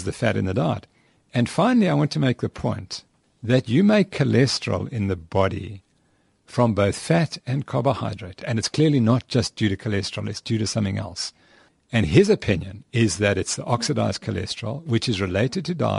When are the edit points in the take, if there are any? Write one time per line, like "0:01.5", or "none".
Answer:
0:08.4

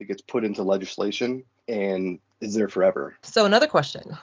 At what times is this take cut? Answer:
0:01.6
0:03.2

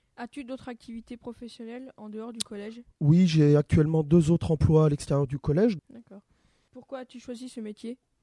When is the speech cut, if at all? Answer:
0:05.8

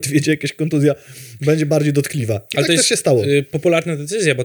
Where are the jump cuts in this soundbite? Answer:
none

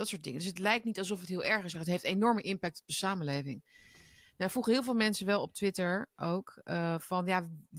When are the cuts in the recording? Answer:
0:01.7

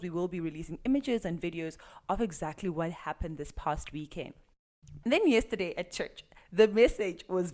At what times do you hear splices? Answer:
0:05.0

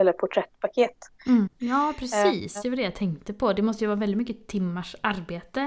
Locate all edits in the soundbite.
0:01.5

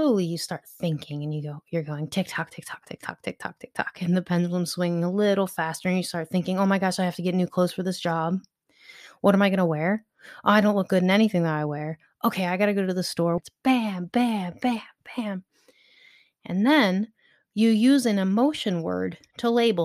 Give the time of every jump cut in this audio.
0:13.4

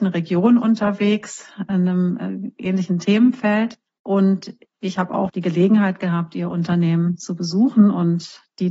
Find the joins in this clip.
0:05.3

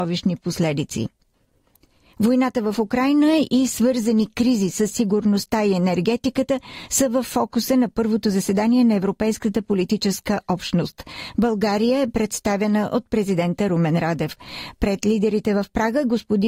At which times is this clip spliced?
0:11.3

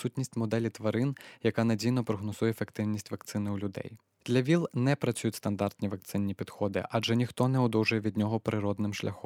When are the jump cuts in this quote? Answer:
none

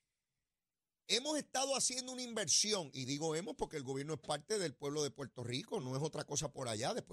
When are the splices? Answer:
0:05.8

